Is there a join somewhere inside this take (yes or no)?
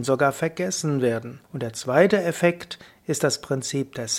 yes